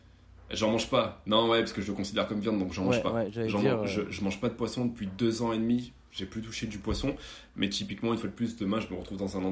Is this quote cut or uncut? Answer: uncut